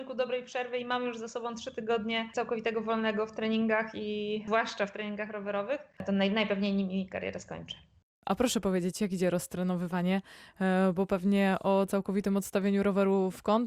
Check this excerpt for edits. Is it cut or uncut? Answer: cut